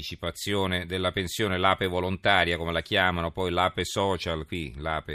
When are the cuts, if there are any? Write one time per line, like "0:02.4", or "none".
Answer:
none